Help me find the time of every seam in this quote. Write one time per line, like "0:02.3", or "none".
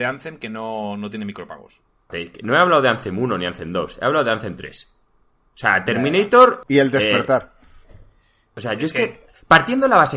0:02.1
0:06.6